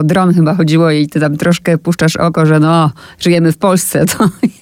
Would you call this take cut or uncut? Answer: uncut